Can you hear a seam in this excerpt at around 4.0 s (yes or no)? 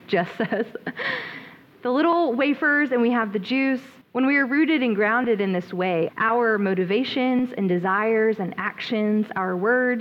yes